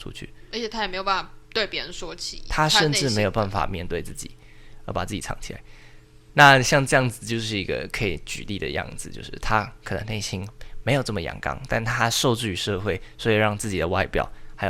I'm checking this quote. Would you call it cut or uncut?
uncut